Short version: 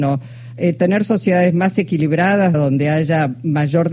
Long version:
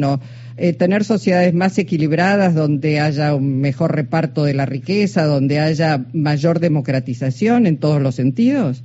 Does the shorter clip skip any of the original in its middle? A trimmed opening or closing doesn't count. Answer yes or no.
yes